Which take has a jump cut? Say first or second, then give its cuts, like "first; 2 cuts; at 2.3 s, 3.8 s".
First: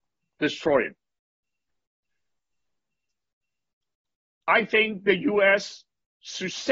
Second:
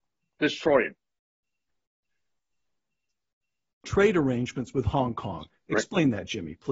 second; 1 cut; at 3.8 s